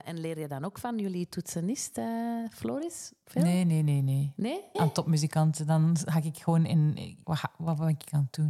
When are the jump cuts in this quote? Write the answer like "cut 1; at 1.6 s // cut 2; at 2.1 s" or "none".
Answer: cut 1; at 4.7 s // cut 2; at 7.2 s